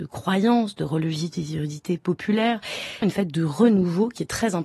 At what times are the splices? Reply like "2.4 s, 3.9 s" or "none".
3.0 s